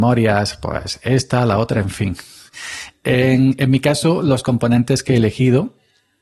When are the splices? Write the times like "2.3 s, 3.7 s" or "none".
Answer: none